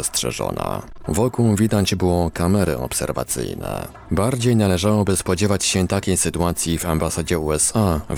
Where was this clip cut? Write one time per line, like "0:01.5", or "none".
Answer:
0:04.1